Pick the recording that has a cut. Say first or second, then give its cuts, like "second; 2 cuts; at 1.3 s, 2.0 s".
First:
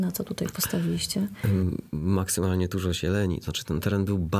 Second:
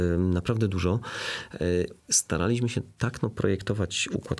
second; 1 cut; at 2.0 s